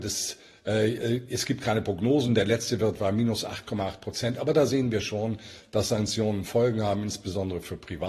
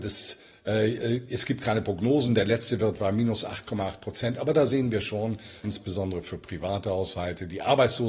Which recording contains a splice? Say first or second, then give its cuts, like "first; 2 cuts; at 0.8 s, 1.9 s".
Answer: second; 1 cut; at 5.6 s